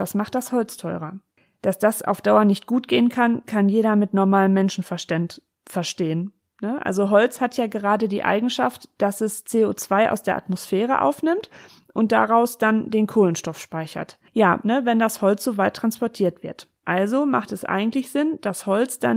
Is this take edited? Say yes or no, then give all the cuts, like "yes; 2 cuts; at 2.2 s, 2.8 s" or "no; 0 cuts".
yes; 2 cuts; at 14.6 s, 16.8 s